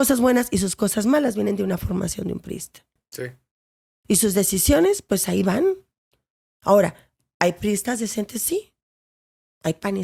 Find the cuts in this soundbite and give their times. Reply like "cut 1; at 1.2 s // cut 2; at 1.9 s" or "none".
none